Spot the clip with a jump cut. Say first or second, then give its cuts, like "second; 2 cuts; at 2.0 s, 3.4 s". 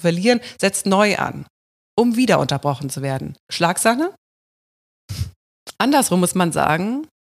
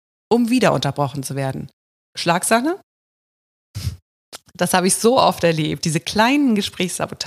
first; 2 cuts; at 3.4 s, 5.7 s